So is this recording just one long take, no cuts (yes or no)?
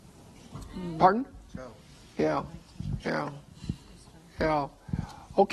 yes